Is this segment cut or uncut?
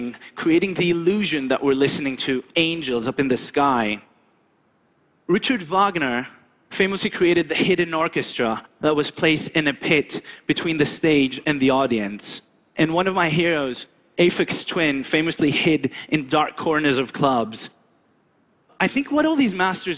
uncut